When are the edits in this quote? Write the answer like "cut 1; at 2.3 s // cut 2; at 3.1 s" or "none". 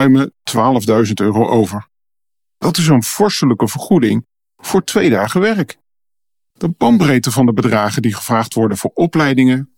cut 1; at 6.5 s